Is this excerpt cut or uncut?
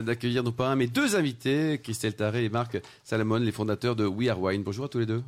uncut